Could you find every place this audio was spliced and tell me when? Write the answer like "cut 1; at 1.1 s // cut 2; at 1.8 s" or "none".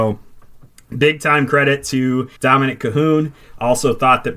cut 1; at 2.4 s

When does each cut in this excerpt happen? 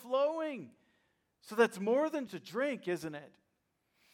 cut 1; at 2.3 s

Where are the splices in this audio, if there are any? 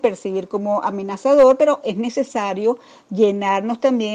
none

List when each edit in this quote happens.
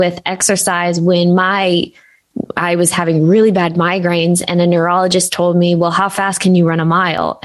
none

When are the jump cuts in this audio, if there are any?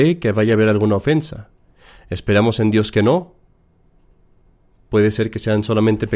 none

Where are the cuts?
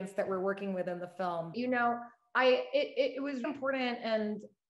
cut 1; at 1.5 s // cut 2; at 3.4 s

